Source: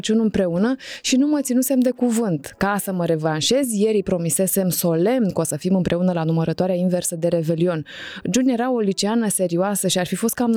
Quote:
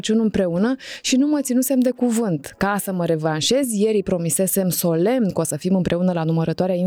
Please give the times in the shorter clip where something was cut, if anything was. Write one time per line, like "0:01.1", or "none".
none

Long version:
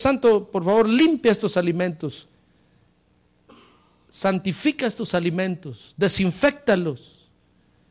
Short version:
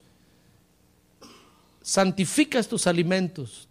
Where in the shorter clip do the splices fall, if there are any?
none

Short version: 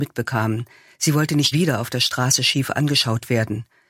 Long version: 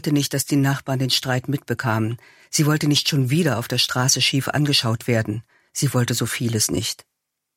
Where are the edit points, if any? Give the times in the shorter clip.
0:01.5

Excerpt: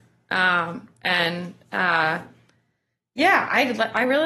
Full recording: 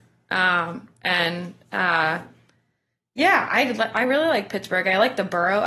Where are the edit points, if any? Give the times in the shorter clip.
none

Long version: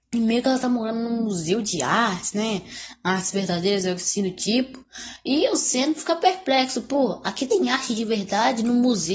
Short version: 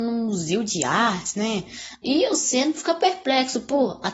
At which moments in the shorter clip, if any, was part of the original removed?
0:02.0

